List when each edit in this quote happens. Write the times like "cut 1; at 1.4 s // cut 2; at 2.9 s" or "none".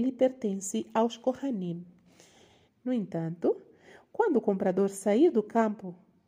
cut 1; at 2.7 s